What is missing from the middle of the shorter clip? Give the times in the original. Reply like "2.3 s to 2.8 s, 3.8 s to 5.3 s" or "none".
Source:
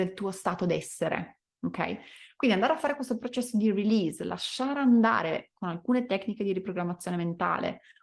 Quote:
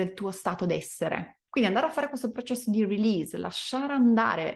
1.5 s to 2.3 s